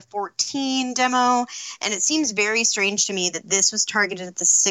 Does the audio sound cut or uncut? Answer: uncut